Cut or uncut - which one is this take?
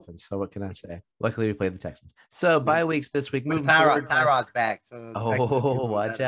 cut